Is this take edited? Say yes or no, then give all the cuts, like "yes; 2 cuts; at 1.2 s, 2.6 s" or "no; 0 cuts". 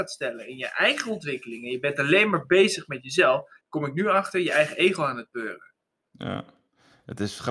yes; 1 cut; at 3.6 s